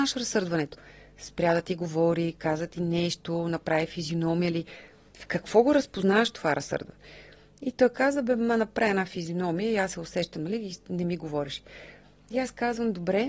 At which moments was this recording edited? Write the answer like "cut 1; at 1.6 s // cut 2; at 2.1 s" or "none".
none